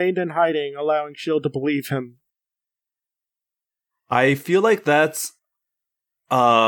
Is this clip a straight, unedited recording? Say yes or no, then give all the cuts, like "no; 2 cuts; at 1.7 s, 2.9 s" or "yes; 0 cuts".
yes; 0 cuts